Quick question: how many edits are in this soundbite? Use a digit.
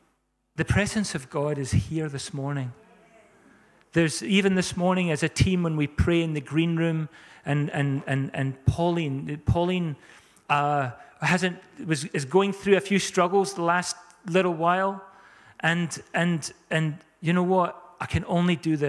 1